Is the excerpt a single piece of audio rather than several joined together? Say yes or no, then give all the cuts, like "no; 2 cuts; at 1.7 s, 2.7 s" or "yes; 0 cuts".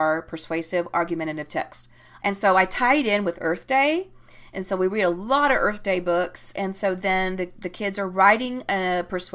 no; 1 cut; at 2.2 s